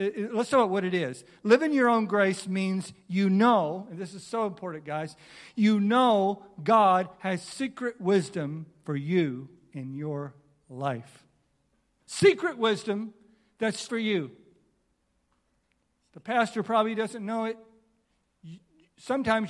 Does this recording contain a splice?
yes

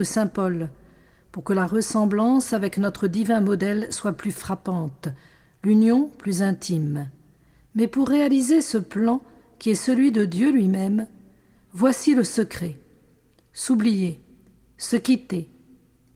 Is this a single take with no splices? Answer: yes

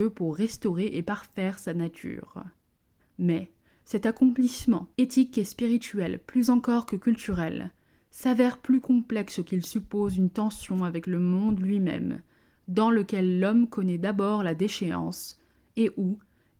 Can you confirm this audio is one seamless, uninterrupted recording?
no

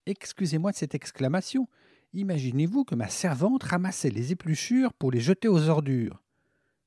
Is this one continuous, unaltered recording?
yes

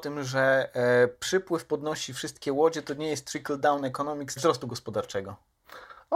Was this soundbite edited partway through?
yes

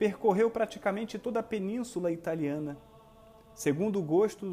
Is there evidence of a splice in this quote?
no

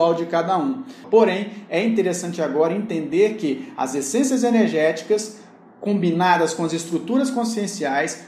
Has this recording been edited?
yes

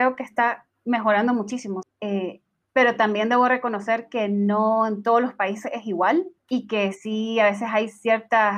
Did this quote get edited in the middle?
yes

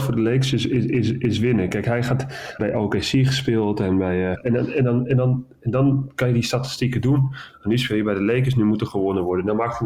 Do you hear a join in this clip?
yes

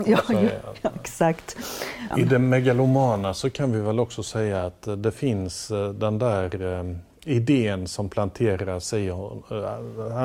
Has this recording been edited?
yes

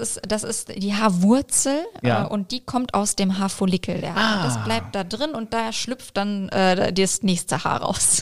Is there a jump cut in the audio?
no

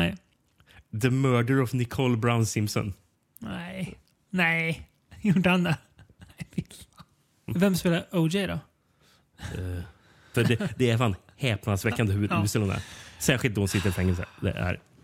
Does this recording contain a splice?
yes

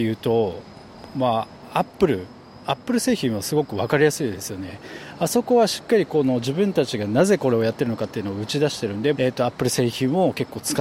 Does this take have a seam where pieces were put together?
yes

